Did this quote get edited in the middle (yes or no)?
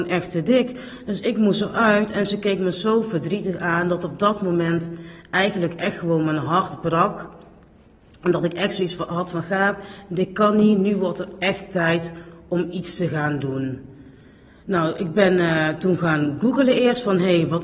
no